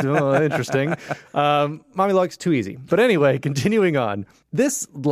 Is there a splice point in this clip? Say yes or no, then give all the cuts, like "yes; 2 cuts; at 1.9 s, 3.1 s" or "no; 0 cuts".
yes; 1 cut; at 2.9 s